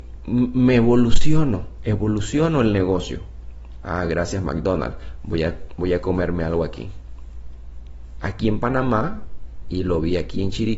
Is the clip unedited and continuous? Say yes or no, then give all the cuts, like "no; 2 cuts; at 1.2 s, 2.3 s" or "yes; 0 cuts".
no; 2 cuts; at 3.8 s, 8.2 s